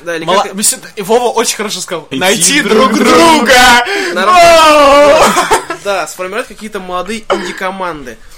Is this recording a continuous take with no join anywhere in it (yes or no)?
no